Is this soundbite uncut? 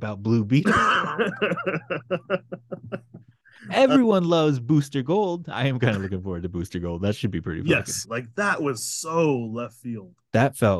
no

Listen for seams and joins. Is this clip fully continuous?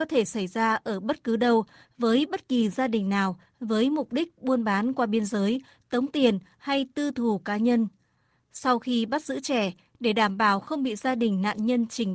yes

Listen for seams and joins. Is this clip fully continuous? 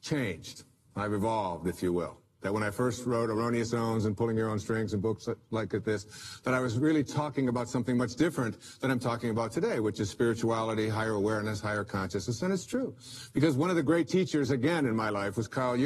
yes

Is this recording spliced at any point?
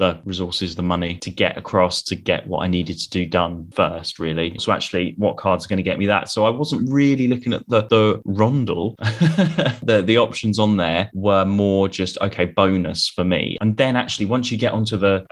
yes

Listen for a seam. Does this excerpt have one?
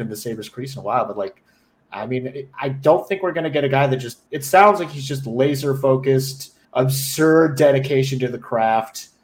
yes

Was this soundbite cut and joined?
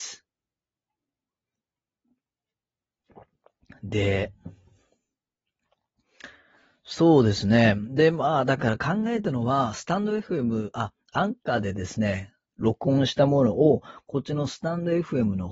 no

